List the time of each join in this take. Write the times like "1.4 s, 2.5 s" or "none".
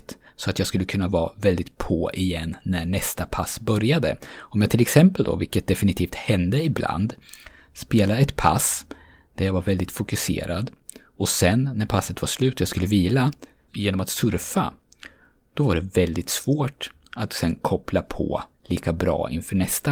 13.7 s, 18.5 s